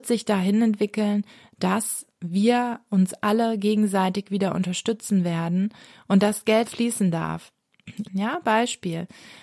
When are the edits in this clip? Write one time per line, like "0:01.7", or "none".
0:06.6
0:08.0

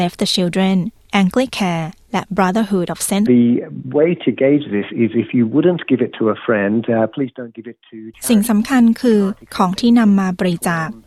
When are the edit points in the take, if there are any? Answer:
0:03.3

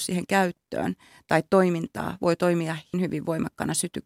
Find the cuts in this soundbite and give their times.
0:02.9

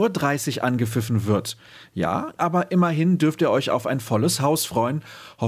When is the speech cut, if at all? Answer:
0:02.4

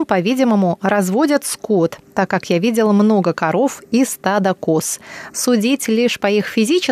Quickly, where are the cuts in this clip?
0:05.3

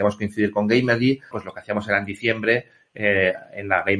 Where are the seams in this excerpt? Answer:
0:01.3

